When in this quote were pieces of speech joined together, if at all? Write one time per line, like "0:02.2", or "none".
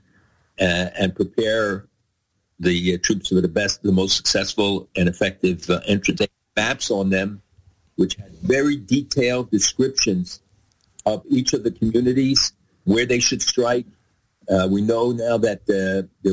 0:06.2